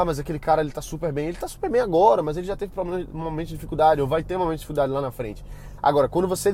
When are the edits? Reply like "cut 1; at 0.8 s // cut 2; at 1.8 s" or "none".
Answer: none

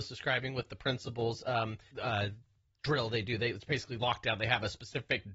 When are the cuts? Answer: cut 1; at 1.9 s

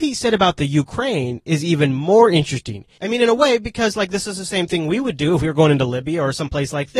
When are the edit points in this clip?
cut 1; at 3.0 s

